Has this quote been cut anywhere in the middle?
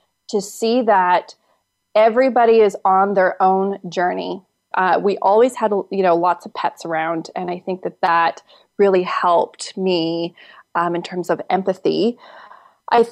yes; 1 cut; at 4.7 s

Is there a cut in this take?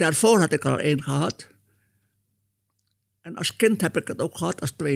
no; 0 cuts

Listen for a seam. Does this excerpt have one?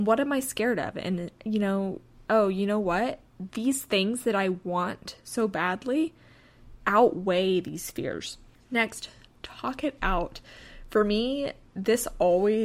yes; 1 cut; at 2.3 s

